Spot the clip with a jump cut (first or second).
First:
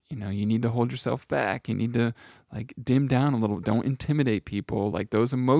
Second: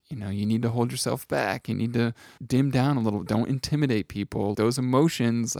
second